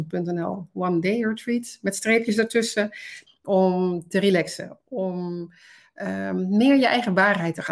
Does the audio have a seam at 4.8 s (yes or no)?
yes